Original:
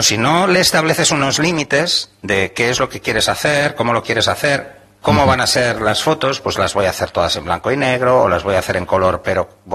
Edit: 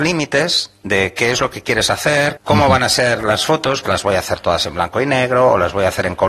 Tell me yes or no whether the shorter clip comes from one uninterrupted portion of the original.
no